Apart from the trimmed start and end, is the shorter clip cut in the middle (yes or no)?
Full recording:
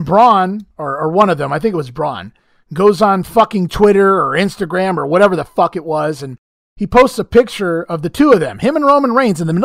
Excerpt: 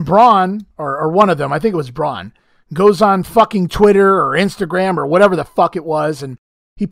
no